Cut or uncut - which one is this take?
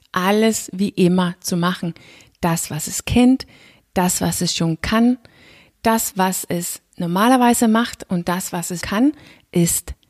cut